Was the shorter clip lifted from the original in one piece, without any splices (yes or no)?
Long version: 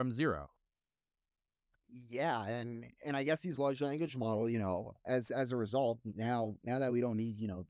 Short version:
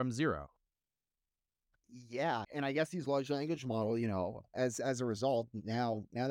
no